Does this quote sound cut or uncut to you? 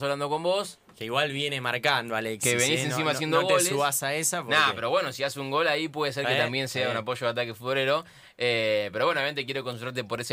uncut